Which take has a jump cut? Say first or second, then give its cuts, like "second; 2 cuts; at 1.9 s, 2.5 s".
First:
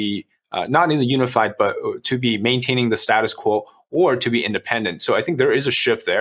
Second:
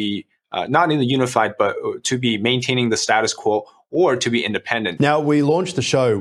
second; 1 cut; at 5.0 s